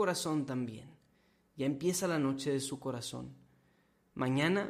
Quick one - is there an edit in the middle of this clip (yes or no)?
no